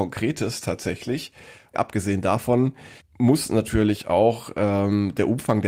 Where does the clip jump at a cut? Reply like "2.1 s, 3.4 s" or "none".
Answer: 1.7 s, 3.0 s

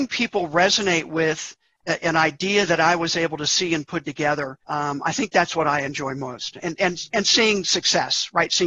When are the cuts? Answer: 4.6 s

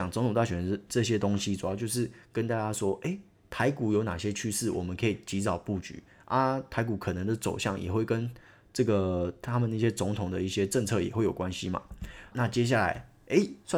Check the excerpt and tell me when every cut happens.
12.3 s

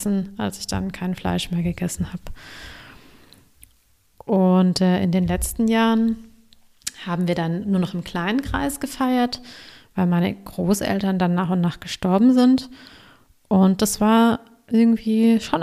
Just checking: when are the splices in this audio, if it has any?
none

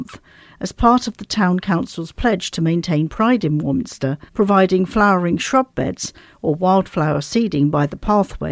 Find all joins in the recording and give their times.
4.3 s

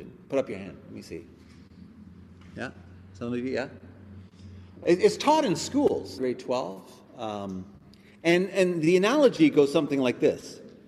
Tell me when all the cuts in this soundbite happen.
6.2 s

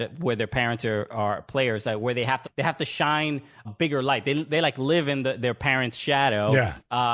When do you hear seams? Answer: 2.4 s, 3.6 s

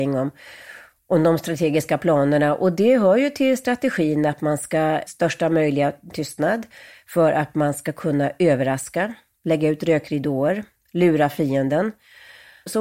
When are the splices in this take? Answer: 5.1 s

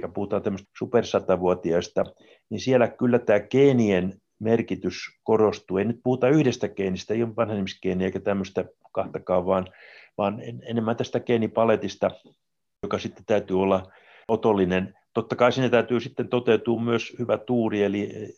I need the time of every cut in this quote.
none

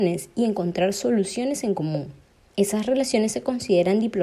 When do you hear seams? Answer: none

